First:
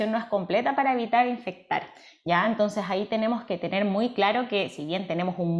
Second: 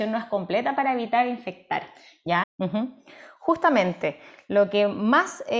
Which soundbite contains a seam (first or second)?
second